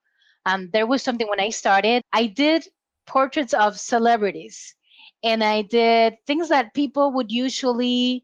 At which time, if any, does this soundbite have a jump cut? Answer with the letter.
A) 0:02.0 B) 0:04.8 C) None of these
A